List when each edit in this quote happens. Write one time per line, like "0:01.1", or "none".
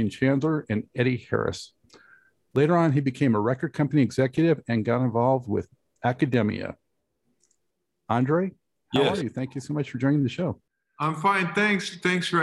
none

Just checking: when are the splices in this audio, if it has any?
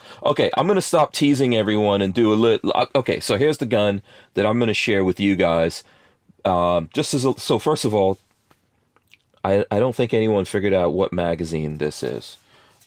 none

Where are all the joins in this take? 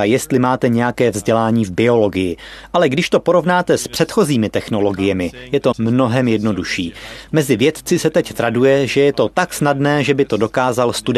0:05.7

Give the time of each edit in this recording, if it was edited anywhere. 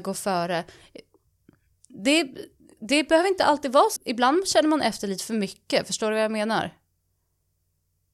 0:04.0

